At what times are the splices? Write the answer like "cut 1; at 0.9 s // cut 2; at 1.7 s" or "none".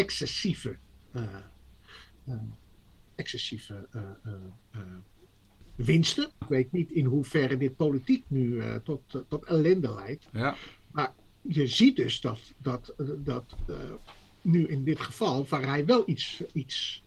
cut 1; at 6.4 s